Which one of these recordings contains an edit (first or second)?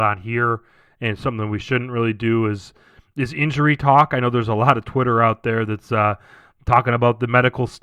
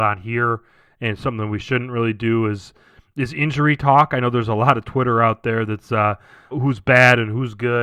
second